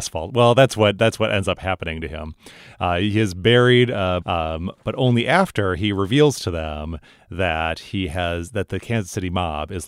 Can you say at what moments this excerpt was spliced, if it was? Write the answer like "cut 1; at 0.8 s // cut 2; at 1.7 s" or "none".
cut 1; at 4.2 s